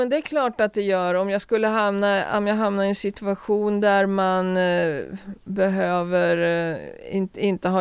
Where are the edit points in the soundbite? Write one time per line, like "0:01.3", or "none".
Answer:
none